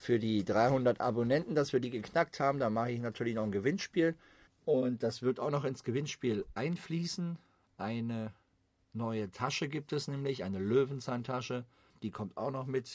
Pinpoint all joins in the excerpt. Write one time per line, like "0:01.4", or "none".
0:04.5